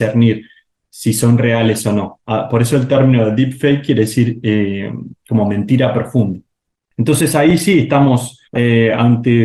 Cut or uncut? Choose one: cut